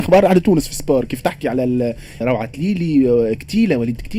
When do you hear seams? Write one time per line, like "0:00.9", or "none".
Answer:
0:02.2